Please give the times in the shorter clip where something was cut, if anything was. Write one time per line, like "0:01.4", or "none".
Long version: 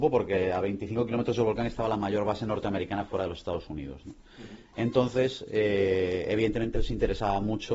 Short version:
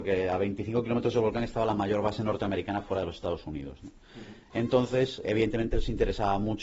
0:05.2